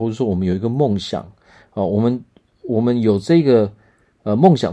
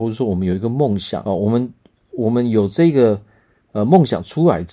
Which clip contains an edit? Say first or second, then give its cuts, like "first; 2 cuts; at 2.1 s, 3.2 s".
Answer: second; 1 cut; at 1.2 s